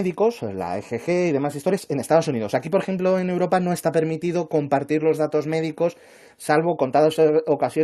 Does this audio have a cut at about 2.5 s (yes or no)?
no